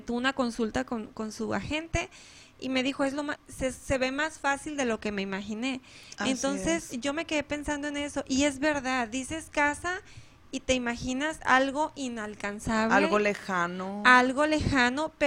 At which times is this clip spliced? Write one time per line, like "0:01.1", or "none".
0:03.4

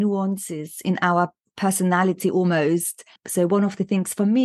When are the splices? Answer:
0:03.2

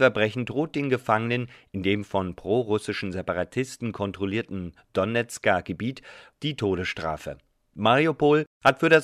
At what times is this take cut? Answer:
0:06.3

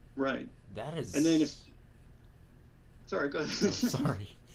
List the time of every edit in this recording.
none

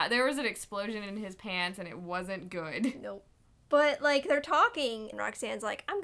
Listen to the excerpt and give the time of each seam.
0:05.1

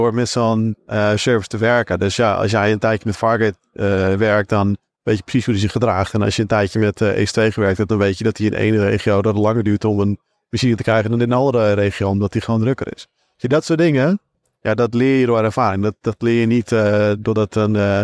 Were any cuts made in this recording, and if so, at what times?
none

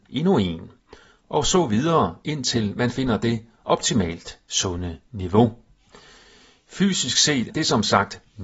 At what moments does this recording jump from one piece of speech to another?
0:07.5

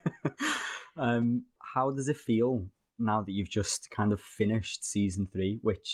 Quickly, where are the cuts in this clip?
0:01.6

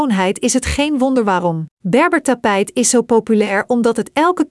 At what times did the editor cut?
0:01.7

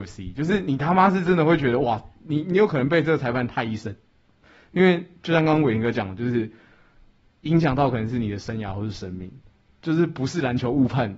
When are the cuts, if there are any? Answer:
none

